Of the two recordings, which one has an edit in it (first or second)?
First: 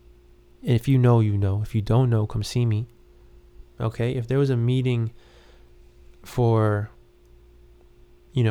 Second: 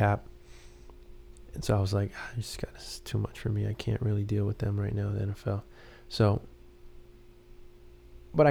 first